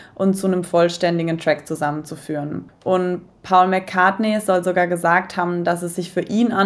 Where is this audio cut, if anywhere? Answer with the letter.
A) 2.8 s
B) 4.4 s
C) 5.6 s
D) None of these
D